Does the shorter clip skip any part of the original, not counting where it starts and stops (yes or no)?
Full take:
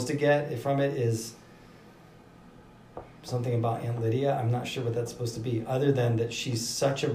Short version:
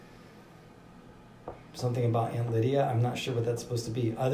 no